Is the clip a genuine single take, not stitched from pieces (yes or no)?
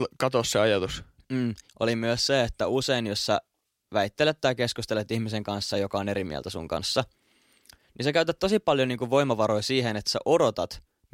no